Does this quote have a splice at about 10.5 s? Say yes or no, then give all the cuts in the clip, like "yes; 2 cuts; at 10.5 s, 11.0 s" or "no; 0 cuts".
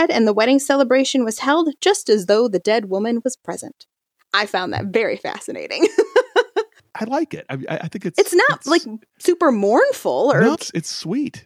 yes; 1 cut; at 10.5 s